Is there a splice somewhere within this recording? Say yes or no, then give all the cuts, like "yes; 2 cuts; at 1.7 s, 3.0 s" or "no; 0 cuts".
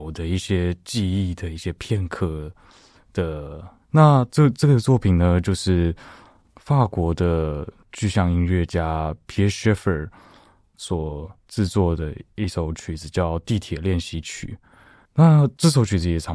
yes; 2 cuts; at 3.8 s, 15.1 s